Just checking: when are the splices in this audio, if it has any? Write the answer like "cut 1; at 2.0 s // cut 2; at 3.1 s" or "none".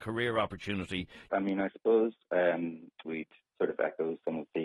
cut 1; at 1.3 s // cut 2; at 3.0 s